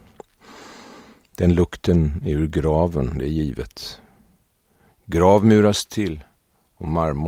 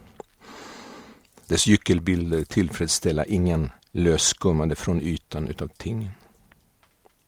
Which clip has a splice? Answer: second; 2 cuts; at 1.3 s, 3.8 s

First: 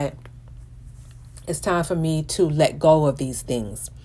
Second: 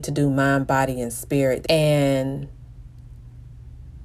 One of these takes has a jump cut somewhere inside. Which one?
second; 1 cut; at 1.6 s

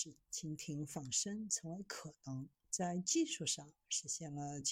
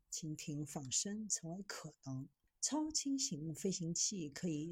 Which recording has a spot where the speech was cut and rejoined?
second; 1 cut; at 2.5 s

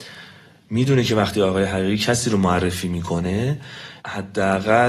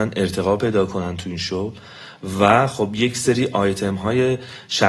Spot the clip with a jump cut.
first; 1 cut; at 4.0 s

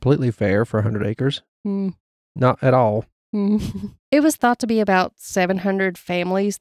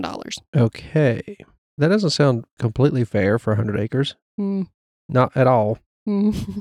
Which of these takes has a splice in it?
first; 1 cut; at 4.0 s

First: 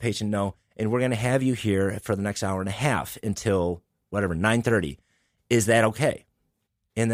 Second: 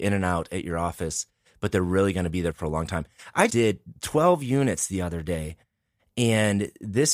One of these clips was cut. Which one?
second; 1 cut; at 3.5 s

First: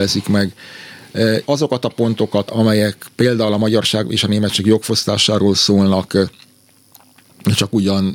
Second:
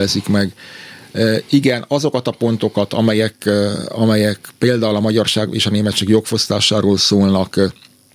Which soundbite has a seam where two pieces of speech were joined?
first; 2 cuts; at 1.4 s, 2.5 s

